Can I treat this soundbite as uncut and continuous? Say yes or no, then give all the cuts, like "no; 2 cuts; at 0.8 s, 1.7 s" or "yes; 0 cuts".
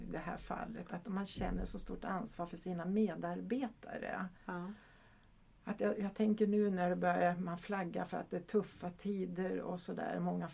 yes; 0 cuts